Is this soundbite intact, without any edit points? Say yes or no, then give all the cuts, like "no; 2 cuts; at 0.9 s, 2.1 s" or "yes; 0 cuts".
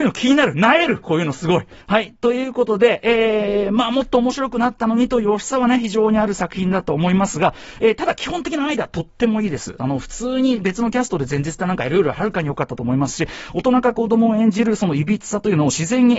no; 1 cut; at 1.8 s